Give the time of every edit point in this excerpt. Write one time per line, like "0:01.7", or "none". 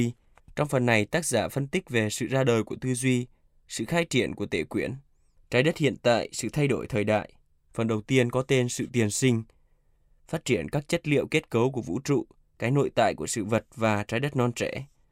0:07.7